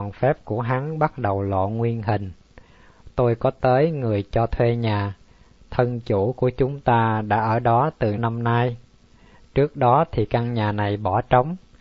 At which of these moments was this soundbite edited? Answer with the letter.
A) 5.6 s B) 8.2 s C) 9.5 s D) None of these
B